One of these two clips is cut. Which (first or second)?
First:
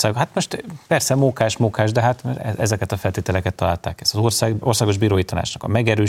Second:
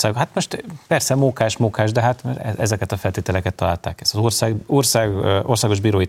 first